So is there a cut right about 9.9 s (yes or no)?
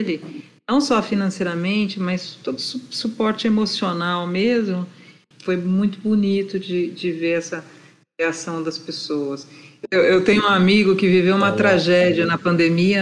yes